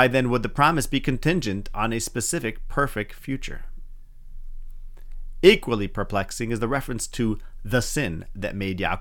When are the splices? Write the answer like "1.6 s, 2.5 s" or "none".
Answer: none

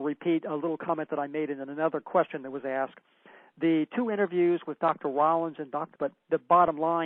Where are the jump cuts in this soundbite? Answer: 5.9 s

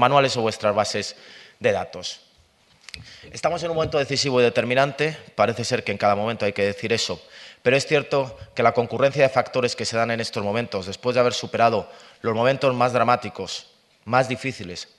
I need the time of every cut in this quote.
none

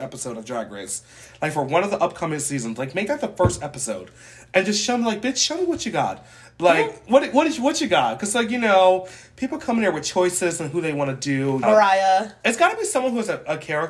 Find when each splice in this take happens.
11.6 s

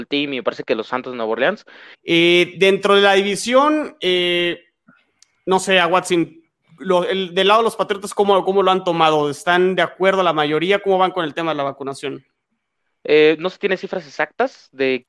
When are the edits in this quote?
1.9 s

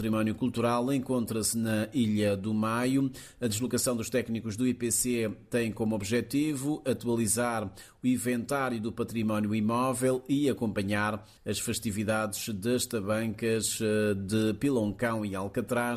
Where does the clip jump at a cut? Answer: none

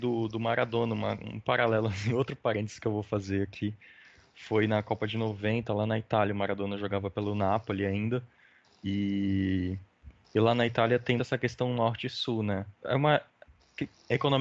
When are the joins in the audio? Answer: 11.2 s, 12.8 s

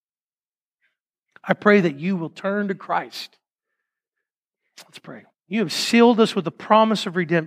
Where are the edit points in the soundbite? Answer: 5.3 s

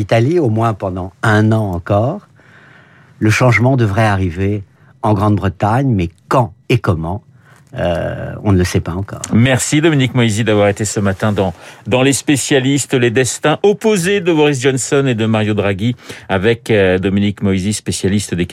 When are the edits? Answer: 6.6 s

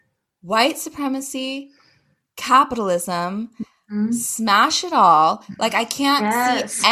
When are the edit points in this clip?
none

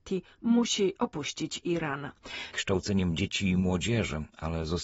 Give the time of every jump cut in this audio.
2.5 s

